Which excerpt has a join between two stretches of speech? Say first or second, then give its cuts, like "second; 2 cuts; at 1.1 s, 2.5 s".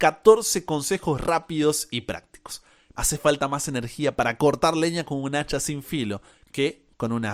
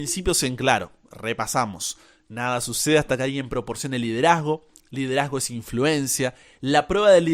first; 1 cut; at 3.0 s